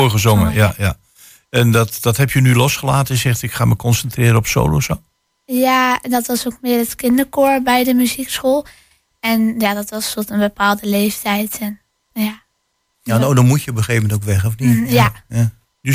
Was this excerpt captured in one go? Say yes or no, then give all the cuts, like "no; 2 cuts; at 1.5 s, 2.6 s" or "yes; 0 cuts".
yes; 0 cuts